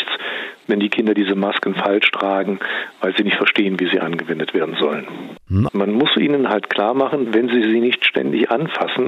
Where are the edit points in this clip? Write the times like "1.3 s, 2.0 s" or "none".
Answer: 5.7 s, 7.2 s